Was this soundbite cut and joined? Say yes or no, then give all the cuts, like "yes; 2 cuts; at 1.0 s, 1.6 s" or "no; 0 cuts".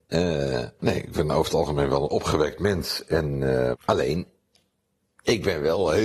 yes; 1 cut; at 3.7 s